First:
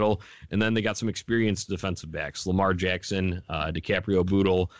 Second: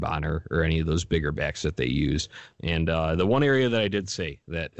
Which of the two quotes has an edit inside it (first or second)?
second